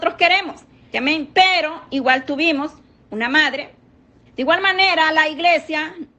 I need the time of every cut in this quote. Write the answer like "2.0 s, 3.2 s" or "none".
0.9 s, 4.3 s